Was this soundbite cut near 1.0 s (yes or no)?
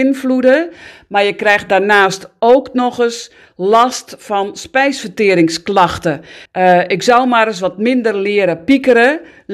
no